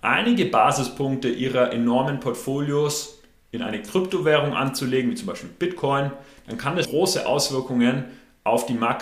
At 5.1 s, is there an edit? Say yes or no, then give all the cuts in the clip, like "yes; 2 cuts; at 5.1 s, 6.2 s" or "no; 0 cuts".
no; 1 cut; at 6.8 s